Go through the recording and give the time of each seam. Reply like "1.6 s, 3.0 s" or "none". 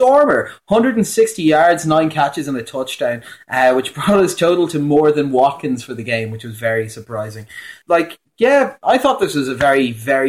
none